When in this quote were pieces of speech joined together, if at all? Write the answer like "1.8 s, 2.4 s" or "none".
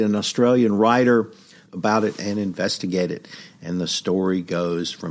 1.7 s